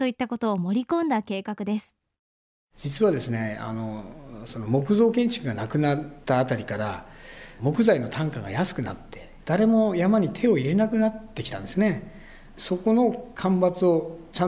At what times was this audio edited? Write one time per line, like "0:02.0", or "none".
none